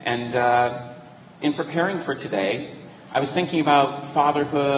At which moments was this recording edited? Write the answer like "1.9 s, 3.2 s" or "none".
1.4 s

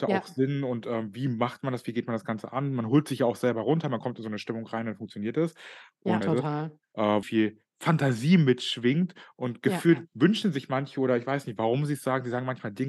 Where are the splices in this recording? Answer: 6.2 s, 7.2 s

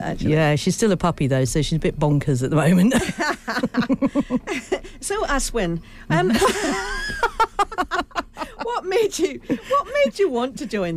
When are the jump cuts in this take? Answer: none

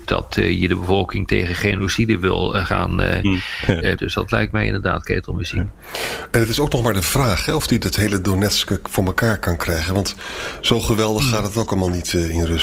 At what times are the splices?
4.0 s

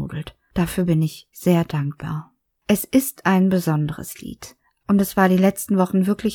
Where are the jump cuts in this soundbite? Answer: 1.3 s, 4.8 s

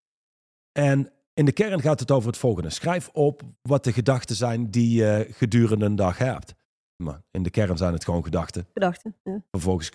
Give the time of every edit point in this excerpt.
7.0 s

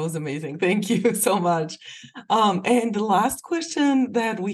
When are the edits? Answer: none

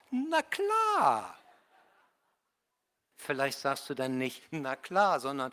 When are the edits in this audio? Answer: 3.1 s

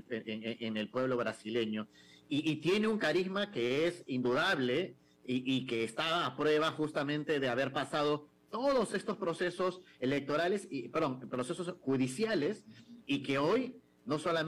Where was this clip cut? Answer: none

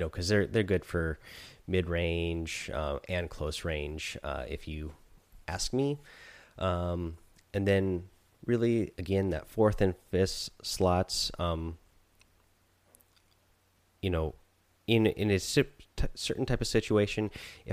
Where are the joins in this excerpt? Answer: none

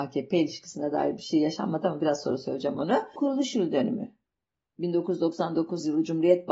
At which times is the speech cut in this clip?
3.2 s

